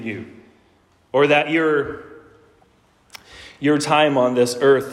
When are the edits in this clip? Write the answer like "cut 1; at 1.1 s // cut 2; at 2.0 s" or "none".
none